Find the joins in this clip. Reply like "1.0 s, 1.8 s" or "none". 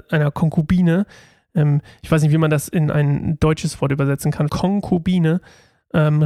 4.5 s